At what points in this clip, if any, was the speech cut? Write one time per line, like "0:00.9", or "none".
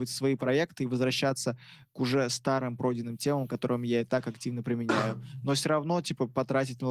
none